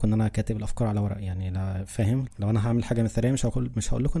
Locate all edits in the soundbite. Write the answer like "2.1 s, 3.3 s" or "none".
2.3 s